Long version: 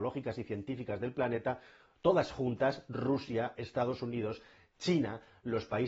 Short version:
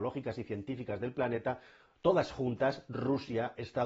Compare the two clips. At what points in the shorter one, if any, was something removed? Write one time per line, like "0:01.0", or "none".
none